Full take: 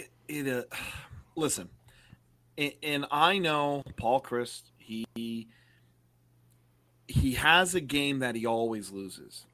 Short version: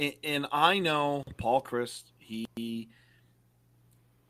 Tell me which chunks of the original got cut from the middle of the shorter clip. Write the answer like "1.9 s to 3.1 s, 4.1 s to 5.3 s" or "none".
none